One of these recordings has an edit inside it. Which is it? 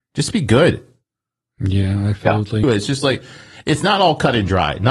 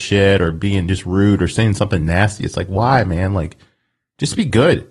first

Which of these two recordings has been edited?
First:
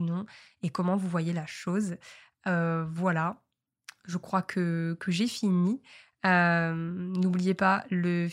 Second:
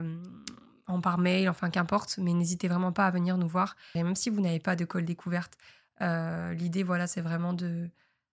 second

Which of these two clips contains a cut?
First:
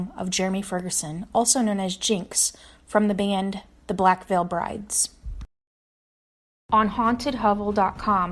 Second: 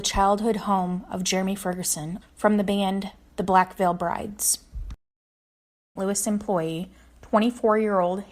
second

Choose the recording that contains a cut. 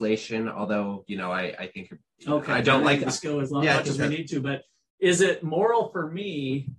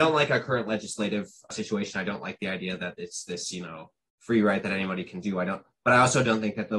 first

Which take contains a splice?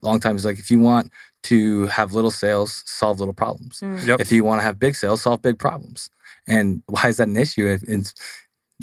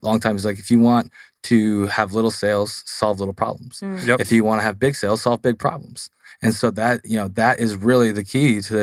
first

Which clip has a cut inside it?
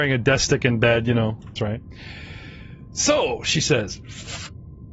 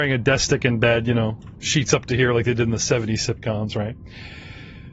first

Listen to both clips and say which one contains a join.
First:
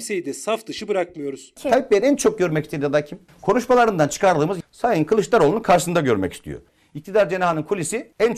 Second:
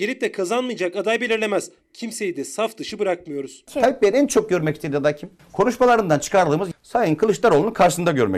second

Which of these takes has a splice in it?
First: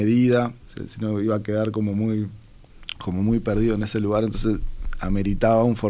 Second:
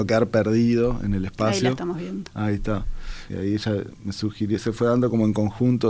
second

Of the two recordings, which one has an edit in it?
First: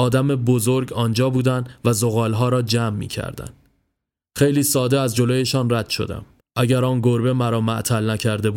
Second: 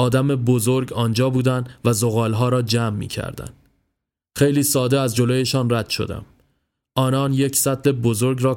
first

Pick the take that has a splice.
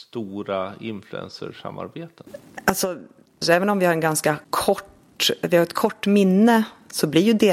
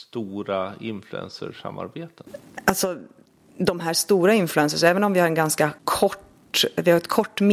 first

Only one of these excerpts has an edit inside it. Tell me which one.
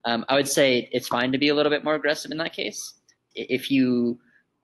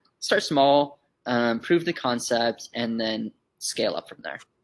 first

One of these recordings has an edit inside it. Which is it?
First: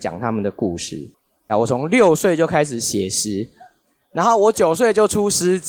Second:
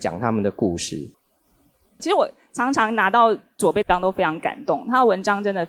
first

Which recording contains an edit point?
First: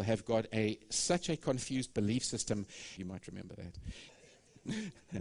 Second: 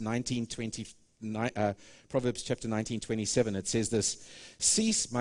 first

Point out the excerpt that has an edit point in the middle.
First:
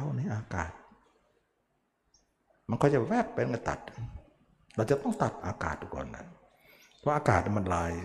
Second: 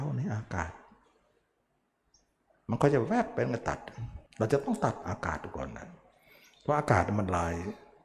second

